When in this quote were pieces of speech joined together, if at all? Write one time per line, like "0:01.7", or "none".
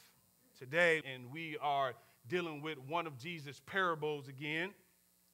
0:01.0